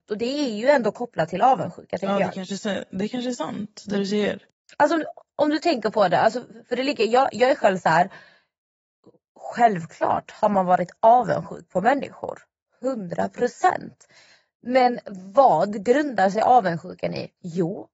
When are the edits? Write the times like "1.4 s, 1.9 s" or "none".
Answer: none

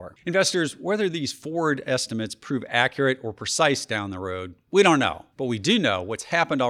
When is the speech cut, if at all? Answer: 5.3 s

